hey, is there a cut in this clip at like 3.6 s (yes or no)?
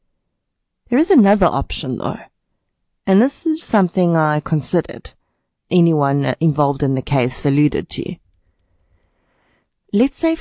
yes